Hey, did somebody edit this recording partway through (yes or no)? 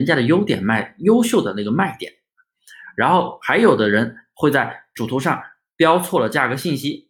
no